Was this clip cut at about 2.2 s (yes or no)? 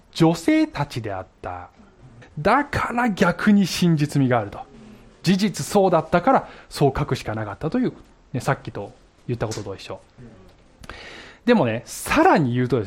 yes